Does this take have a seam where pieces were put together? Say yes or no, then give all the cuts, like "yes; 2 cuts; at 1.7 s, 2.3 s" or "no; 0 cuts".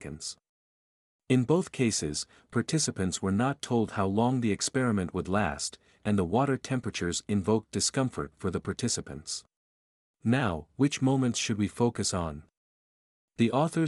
yes; 1 cut; at 10.1 s